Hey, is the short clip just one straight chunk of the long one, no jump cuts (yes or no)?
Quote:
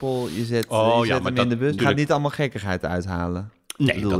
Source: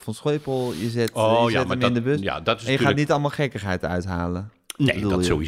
no